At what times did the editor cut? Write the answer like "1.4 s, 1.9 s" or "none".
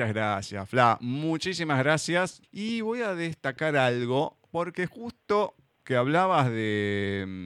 2.4 s